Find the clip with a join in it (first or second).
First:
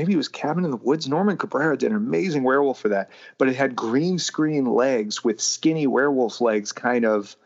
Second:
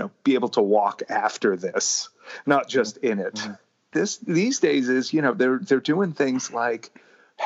second